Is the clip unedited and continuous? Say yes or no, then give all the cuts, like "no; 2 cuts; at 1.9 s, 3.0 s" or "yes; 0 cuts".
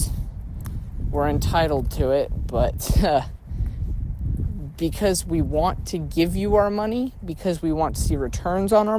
yes; 0 cuts